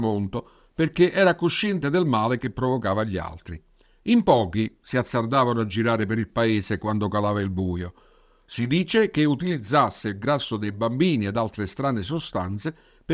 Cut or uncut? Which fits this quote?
uncut